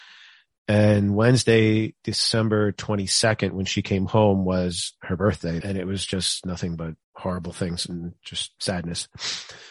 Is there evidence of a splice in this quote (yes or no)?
yes